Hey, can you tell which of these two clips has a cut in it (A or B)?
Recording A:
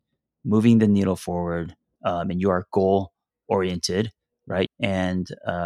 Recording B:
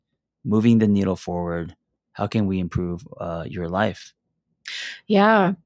A